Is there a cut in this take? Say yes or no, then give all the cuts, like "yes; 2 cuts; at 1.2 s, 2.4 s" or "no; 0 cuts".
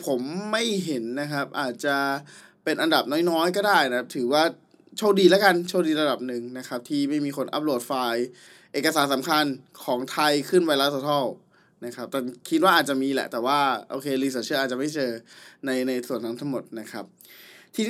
no; 0 cuts